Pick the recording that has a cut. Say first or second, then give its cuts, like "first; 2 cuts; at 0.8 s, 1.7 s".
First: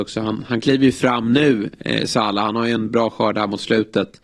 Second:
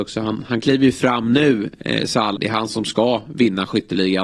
second; 1 cut; at 2.3 s